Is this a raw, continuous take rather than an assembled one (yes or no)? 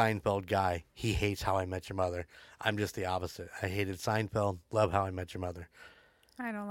yes